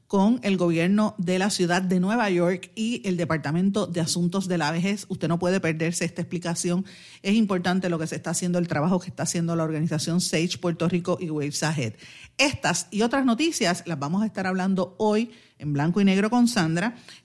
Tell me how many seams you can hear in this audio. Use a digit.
0